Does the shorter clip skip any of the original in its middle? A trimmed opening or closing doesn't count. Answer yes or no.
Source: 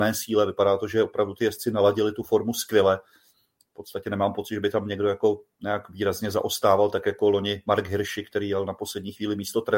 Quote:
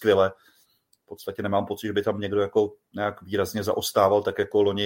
no